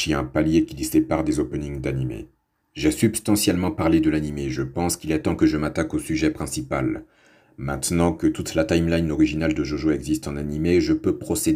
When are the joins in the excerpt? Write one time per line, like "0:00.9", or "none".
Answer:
0:02.6